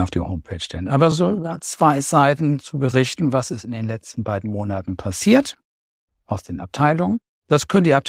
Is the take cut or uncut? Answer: uncut